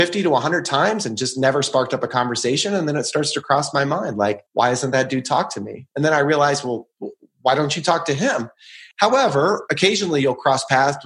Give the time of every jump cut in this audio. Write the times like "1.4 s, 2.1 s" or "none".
4.5 s, 8.9 s